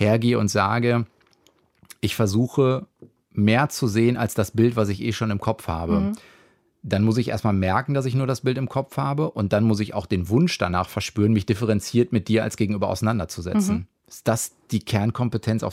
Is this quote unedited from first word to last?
yes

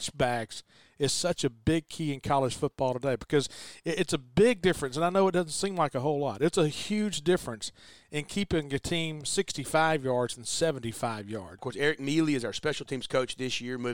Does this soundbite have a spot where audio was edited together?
yes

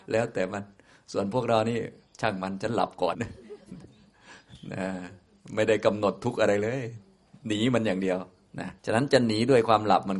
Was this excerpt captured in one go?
no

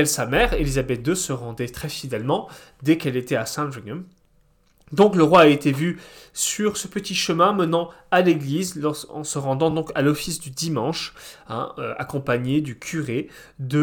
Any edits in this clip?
no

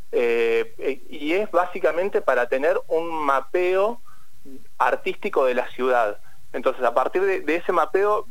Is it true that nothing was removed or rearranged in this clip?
yes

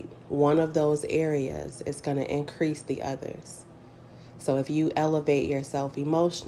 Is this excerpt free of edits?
yes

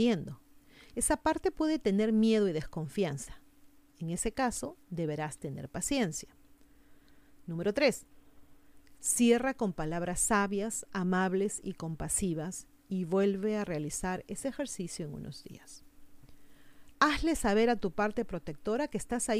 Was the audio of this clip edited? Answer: yes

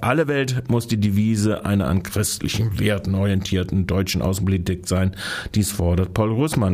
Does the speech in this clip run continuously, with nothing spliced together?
yes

